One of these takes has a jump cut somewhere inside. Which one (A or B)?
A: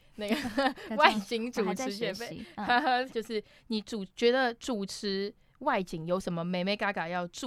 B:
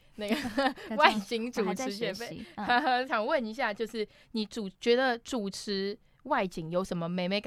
A